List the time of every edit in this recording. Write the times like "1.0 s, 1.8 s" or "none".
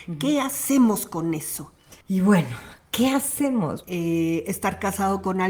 2.0 s, 3.8 s